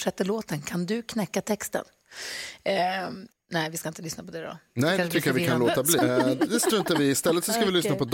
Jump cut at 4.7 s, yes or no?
no